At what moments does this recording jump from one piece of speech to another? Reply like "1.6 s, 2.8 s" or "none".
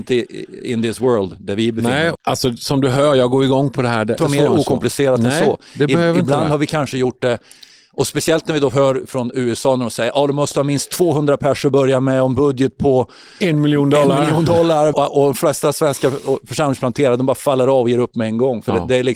2.2 s, 4.2 s, 14.9 s